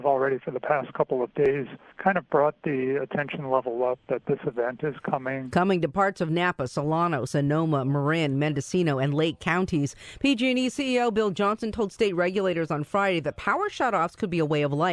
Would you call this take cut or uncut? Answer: uncut